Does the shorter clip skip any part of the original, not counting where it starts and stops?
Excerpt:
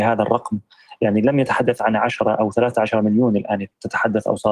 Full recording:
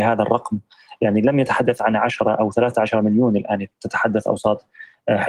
no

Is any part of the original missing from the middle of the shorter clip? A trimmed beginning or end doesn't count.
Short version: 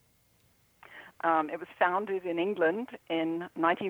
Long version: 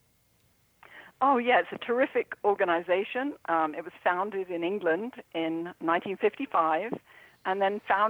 yes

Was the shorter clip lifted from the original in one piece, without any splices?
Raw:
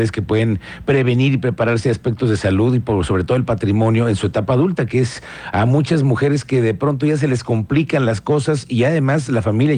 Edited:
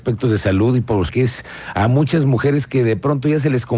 no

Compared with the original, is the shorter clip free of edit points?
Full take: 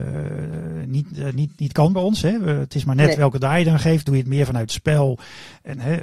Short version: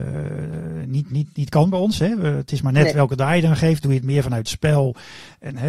no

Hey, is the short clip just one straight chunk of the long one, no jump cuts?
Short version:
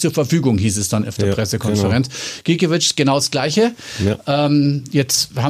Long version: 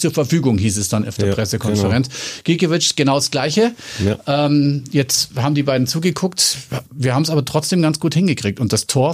yes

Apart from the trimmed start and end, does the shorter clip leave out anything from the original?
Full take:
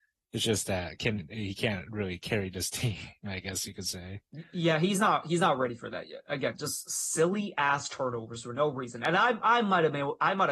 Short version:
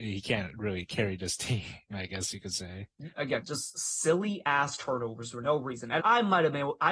yes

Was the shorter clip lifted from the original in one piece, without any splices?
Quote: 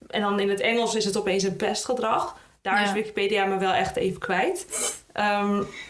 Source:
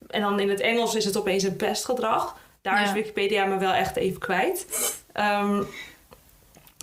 yes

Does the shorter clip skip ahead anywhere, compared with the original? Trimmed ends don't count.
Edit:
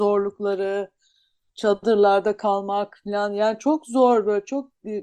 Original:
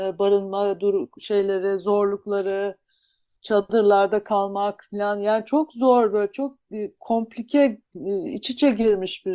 no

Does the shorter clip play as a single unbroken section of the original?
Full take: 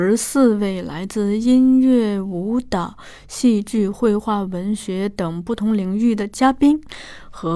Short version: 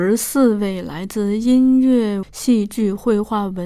no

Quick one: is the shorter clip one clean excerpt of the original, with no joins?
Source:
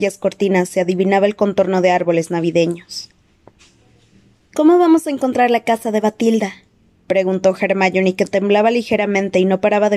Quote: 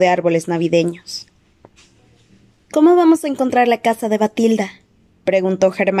yes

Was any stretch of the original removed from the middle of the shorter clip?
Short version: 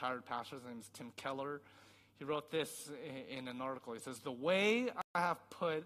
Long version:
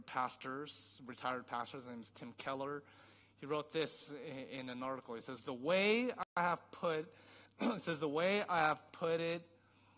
no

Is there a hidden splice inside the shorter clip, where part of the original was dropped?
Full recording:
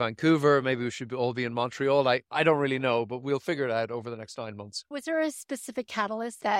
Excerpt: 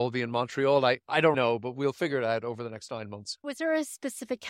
yes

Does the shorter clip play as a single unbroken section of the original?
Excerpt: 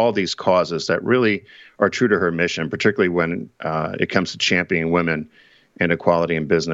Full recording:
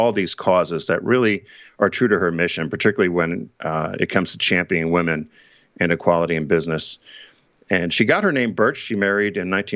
yes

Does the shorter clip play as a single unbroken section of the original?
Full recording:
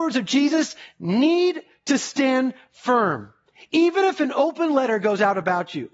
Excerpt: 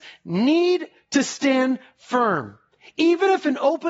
yes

